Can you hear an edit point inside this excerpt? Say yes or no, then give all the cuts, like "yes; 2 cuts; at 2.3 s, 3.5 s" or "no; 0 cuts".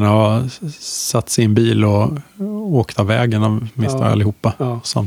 no; 0 cuts